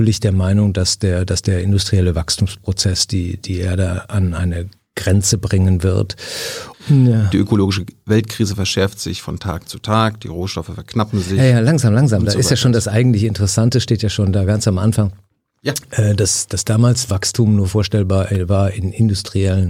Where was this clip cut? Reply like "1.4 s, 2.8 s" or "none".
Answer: 6.7 s